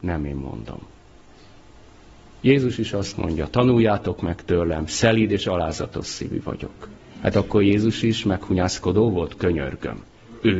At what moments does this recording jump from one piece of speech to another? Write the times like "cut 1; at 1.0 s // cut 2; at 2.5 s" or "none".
none

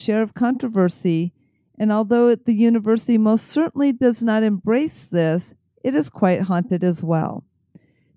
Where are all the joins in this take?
none

